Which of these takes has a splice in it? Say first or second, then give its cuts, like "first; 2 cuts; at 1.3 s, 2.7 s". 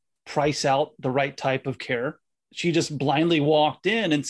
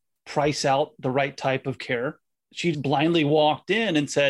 second; 1 cut; at 2.7 s